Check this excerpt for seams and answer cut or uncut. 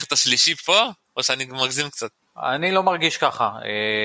uncut